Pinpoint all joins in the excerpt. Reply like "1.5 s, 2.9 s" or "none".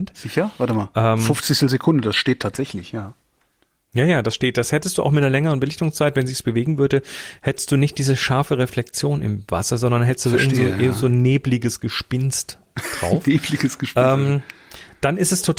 none

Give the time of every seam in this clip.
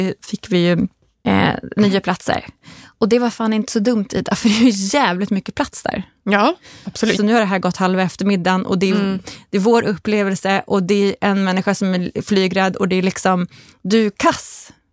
7.2 s

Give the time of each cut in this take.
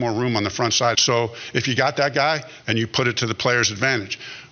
0.9 s, 2.6 s

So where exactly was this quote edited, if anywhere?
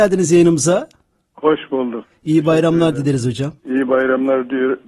3.6 s

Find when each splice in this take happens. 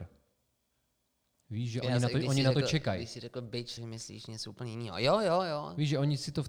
3.8 s

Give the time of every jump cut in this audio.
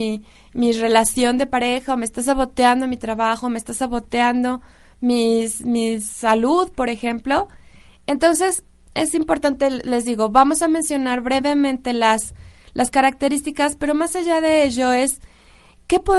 none

